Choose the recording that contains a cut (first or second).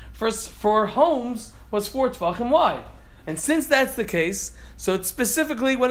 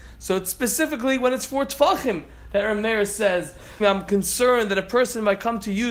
second